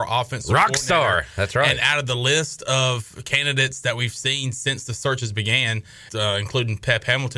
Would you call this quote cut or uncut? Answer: cut